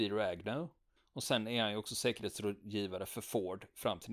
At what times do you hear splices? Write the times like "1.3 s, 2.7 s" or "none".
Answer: 1.0 s